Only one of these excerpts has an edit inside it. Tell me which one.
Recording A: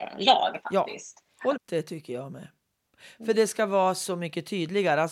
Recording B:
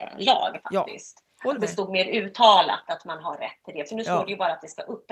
A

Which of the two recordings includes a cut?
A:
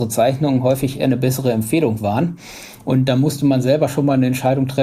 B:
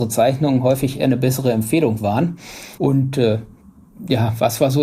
B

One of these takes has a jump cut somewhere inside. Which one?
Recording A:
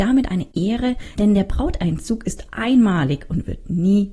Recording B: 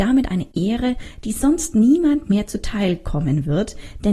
A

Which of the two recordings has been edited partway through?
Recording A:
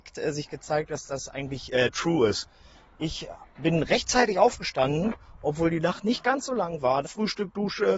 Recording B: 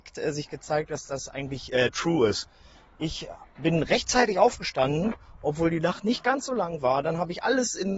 A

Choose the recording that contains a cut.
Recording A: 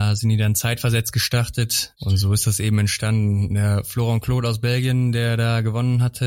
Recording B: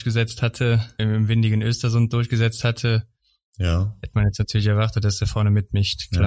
B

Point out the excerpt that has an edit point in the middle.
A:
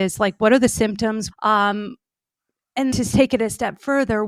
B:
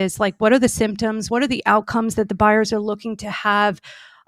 A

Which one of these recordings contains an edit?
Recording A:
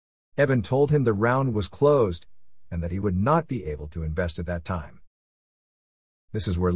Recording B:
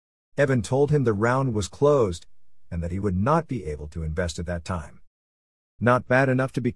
B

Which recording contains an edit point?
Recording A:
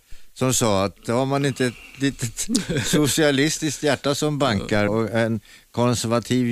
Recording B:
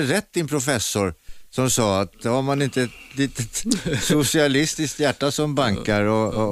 A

